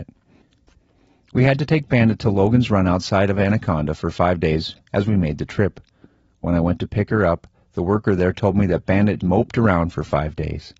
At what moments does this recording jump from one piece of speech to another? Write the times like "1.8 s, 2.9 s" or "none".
9.2 s